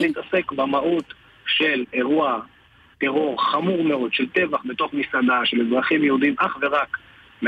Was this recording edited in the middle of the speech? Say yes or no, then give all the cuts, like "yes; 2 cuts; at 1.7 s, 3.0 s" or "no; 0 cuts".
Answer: no; 0 cuts